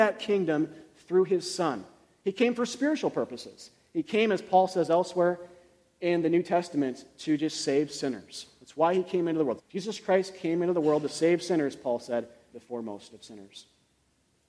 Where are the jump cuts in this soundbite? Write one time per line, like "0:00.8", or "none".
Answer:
0:09.6
0:12.5